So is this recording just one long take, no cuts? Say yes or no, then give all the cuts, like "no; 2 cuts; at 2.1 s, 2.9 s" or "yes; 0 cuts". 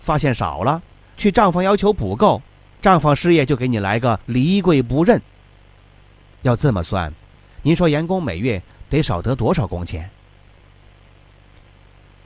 no; 1 cut; at 6.3 s